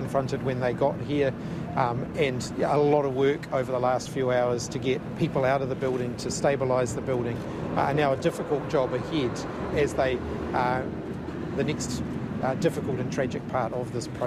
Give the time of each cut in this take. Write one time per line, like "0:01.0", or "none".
0:09.7
0:11.6